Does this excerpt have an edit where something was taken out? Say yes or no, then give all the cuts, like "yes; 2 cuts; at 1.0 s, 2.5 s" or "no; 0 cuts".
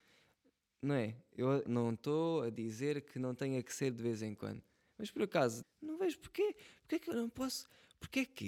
yes; 2 cuts; at 1.7 s, 5.6 s